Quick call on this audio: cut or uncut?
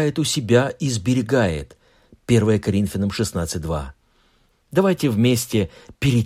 cut